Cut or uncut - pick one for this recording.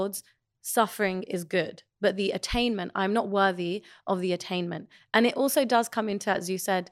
uncut